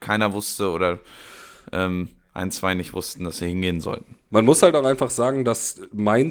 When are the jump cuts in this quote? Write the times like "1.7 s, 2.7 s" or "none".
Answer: 4.3 s